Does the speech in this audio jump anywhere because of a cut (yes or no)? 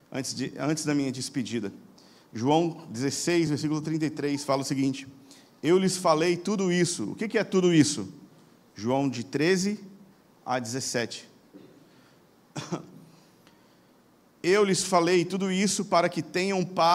no